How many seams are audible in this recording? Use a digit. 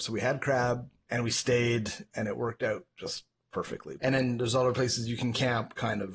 2